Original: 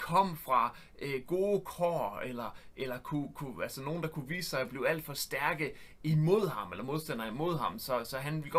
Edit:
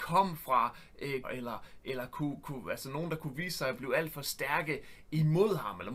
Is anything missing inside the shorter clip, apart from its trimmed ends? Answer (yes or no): yes